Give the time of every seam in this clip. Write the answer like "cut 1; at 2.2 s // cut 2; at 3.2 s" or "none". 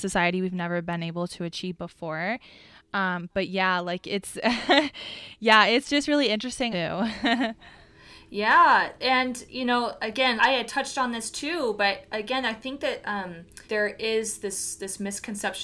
cut 1; at 6.7 s // cut 2; at 10.4 s // cut 3; at 13.6 s